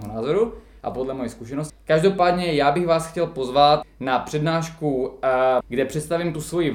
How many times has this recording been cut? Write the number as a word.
three